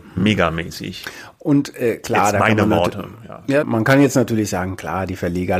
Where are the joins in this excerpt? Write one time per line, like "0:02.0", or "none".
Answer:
0:03.6